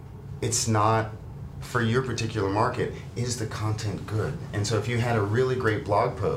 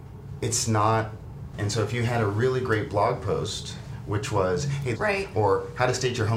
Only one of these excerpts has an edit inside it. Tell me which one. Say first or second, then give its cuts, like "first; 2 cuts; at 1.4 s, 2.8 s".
second; 2 cuts; at 1.5 s, 4.9 s